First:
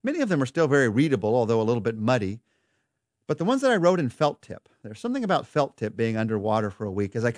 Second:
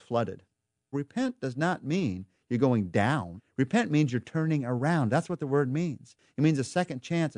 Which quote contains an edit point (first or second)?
second